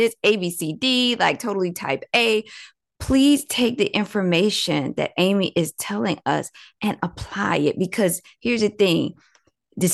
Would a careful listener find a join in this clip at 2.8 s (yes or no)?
yes